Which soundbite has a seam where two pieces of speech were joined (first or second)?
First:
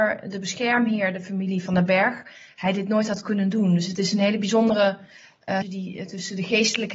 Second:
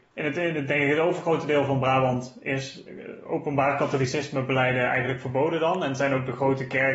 first